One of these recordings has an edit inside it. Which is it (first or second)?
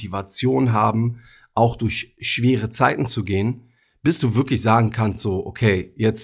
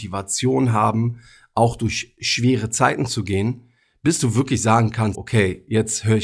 second